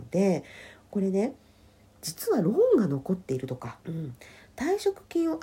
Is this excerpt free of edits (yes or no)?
no